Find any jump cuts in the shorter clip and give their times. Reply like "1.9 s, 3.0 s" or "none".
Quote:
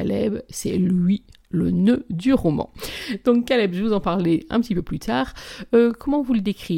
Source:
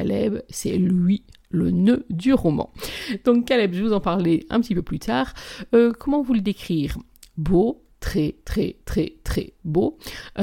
none